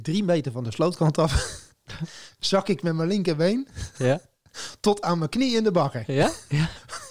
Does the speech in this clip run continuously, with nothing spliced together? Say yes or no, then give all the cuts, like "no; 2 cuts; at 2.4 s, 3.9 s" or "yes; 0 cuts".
yes; 0 cuts